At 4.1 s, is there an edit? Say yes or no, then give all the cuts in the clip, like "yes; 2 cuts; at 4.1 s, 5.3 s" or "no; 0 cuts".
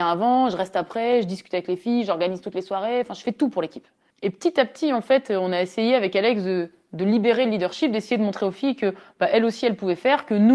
yes; 1 cut; at 4.1 s